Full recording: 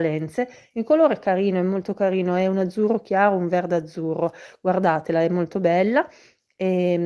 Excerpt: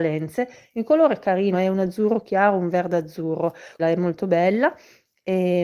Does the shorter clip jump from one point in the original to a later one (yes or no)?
yes